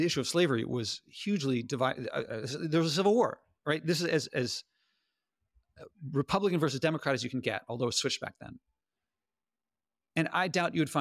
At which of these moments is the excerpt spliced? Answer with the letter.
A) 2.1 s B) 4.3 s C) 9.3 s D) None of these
B